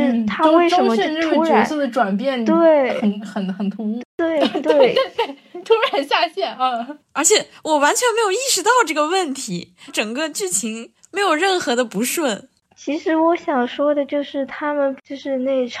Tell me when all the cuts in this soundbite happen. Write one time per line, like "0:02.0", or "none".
0:04.0
0:09.9

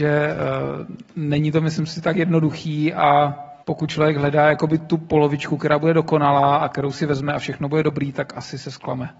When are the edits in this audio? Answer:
0:03.6

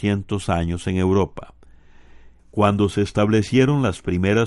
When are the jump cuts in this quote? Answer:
0:02.4

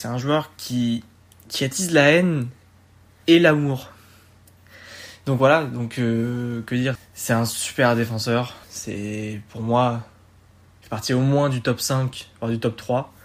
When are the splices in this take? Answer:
0:07.0
0:08.6

